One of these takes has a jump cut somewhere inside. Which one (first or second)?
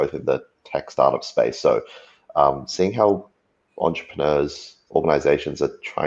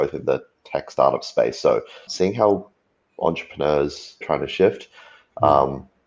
second